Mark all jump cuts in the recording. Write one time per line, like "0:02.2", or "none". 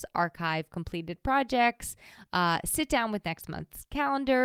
none